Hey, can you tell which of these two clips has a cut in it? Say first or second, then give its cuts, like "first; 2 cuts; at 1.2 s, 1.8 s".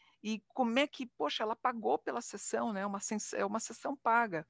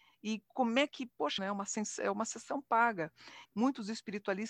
second; 2 cuts; at 1.4 s, 3.4 s